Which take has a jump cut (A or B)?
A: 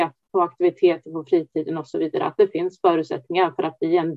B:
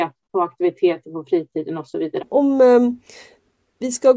B